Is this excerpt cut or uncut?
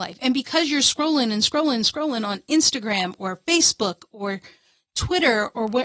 uncut